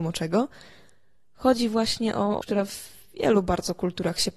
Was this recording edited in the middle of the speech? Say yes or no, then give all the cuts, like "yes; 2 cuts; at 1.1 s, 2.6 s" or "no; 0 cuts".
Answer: yes; 1 cut; at 2.4 s